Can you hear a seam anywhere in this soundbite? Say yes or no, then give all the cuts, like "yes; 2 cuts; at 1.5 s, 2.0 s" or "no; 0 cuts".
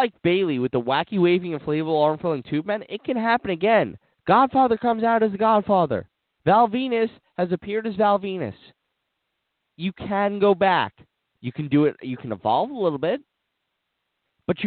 no; 0 cuts